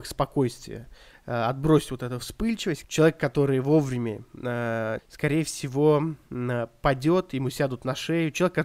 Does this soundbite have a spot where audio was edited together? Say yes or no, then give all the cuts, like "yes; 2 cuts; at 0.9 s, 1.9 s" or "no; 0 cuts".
yes; 2 cuts; at 2.8 s, 5.0 s